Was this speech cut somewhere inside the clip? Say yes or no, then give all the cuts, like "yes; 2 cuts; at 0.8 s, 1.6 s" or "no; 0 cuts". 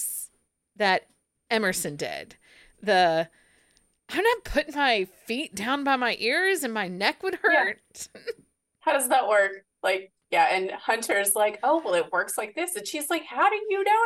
no; 0 cuts